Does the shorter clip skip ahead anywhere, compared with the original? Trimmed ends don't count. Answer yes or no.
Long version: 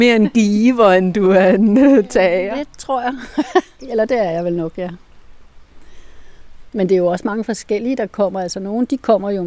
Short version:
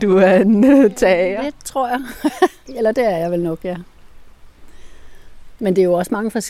no